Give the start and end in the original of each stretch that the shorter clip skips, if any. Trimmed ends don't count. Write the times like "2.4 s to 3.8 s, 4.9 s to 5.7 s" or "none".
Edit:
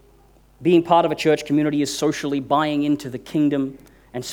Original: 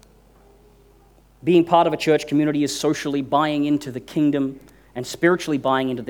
none